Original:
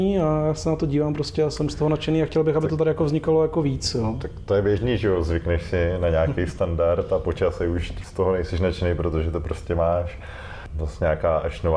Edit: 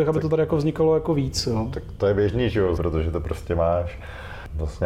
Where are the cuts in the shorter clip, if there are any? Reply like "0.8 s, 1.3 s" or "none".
2.8 s